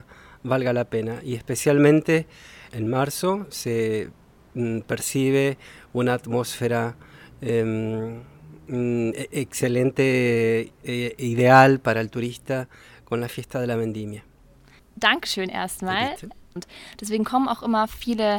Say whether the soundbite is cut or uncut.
cut